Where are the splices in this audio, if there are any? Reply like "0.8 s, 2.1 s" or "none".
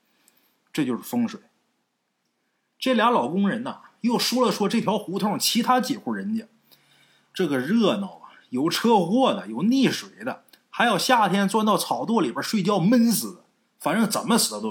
none